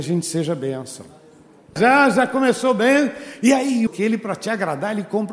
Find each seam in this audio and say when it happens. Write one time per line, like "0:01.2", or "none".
0:01.8
0:03.9